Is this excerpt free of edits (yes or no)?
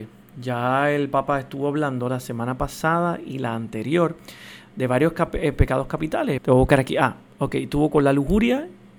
no